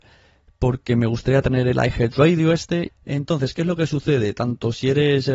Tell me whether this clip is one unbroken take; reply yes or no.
no